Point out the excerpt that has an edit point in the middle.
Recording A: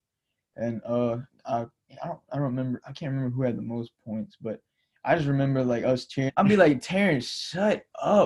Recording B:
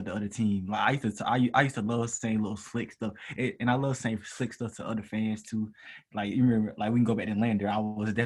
A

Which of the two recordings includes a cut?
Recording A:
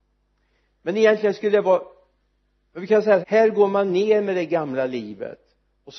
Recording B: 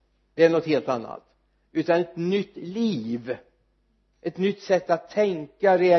A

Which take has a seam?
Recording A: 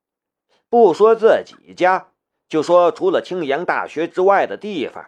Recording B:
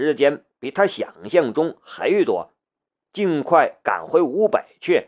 B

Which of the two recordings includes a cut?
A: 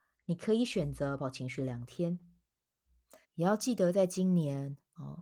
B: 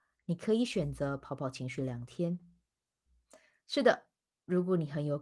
A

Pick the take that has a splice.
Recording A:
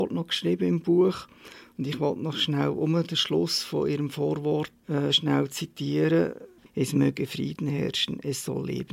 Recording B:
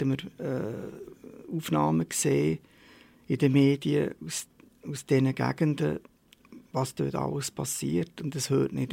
A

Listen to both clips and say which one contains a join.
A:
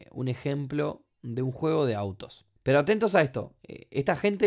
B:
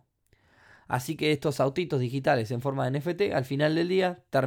A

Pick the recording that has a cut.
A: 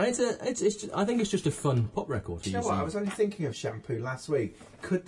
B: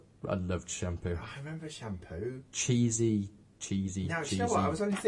A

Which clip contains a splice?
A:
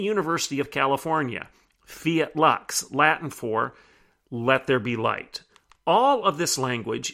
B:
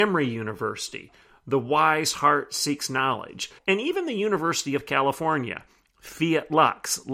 B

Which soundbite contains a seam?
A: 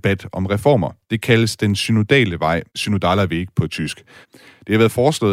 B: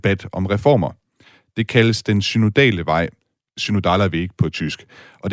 A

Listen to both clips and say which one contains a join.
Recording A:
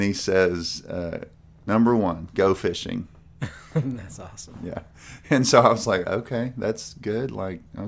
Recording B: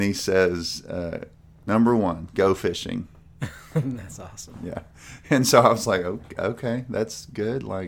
A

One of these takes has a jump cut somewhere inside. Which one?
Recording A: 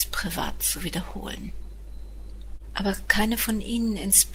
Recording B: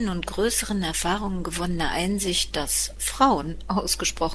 A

